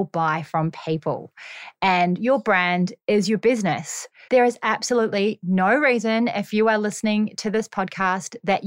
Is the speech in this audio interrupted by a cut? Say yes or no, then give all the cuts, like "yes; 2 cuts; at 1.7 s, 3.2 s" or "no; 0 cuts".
yes; 1 cut; at 4.3 s